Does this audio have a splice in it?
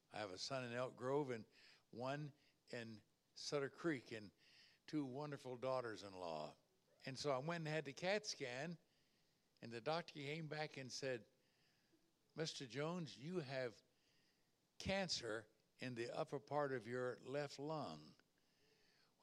yes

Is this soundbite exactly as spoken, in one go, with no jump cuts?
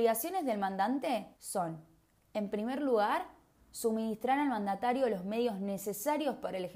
no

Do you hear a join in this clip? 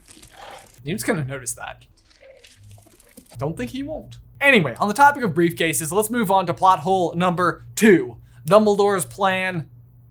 no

